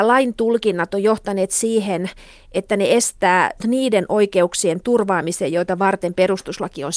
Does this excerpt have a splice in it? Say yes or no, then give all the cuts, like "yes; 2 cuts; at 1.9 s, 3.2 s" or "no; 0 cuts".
yes; 1 cut; at 3.6 s